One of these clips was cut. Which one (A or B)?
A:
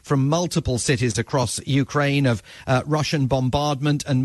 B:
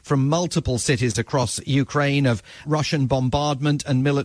B